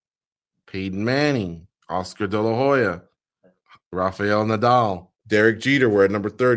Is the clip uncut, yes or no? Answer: no